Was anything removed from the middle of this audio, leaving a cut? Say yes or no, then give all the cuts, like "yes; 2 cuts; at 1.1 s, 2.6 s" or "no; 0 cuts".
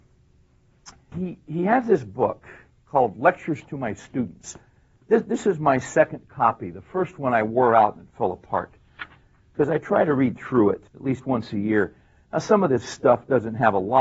yes; 2 cuts; at 1.1 s, 10.9 s